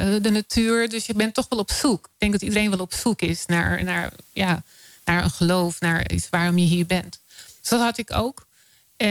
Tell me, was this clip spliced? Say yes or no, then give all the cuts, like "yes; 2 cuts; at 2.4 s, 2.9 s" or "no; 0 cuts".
no; 0 cuts